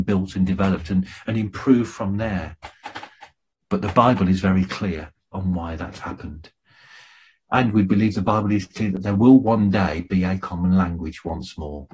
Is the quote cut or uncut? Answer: cut